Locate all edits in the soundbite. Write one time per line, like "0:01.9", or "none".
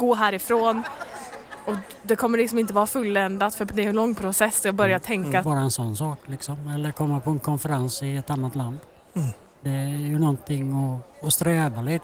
0:05.4